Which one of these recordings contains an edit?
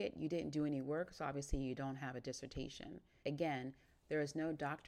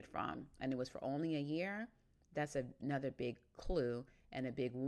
first; 1 cut; at 3.2 s

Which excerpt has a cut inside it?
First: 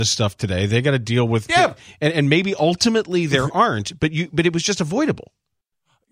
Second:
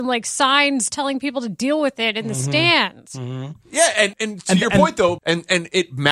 second; 2 cuts; at 4.1 s, 5.2 s

